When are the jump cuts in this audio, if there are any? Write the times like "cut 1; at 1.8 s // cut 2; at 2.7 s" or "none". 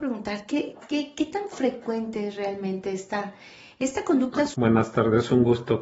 cut 1; at 4.5 s